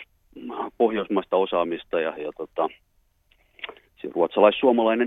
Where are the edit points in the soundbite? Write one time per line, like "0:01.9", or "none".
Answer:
0:02.2